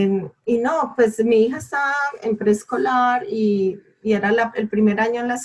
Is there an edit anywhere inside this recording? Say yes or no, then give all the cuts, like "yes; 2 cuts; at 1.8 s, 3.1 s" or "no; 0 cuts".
no; 0 cuts